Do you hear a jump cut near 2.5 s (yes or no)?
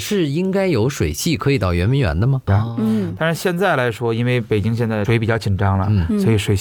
yes